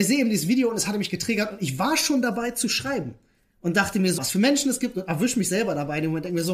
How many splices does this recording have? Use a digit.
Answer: 1